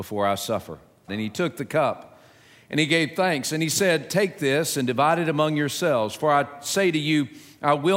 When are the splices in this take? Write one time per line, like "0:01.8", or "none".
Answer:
0:01.1